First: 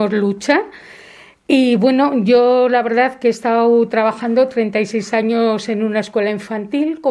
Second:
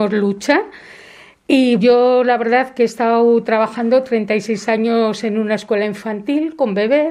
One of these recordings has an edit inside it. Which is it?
second; 1 cut; at 1.8 s

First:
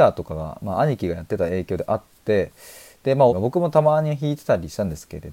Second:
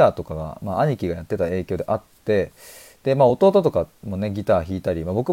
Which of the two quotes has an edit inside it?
first; 1 cut; at 3.3 s

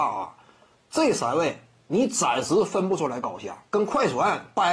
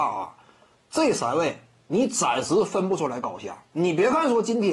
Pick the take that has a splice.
first; 1 cut; at 3.7 s

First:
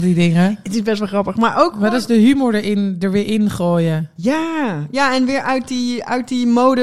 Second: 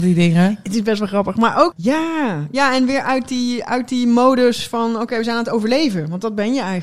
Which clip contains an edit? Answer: second; 1 cut; at 1.7 s

